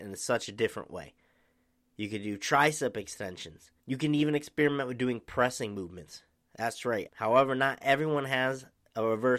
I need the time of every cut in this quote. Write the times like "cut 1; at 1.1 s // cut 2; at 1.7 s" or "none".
cut 1; at 3.8 s // cut 2; at 7.1 s